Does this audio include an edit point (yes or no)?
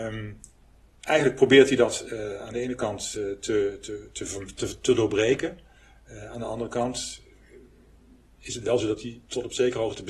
no